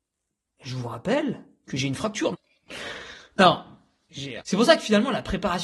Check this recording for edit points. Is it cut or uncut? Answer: cut